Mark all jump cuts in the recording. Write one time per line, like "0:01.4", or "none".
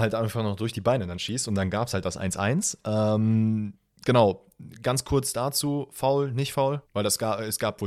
0:06.9